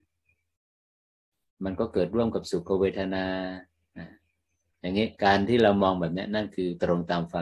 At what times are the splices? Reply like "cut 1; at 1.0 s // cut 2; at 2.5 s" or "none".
cut 1; at 5.2 s